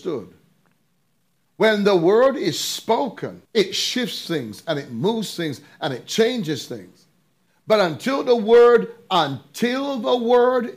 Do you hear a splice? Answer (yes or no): yes